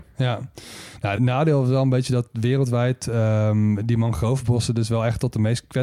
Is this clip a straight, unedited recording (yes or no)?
no